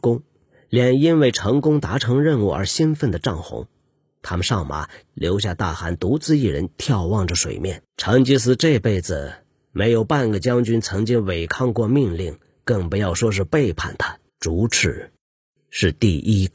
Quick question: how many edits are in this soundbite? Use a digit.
3